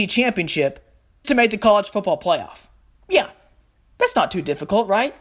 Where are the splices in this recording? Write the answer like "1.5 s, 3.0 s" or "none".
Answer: 1.2 s